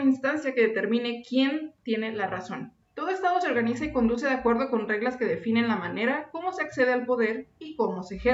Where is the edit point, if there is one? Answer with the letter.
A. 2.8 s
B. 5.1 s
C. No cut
A